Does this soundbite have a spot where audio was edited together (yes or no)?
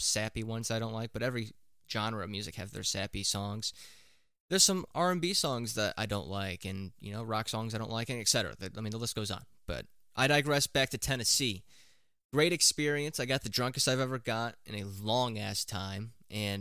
no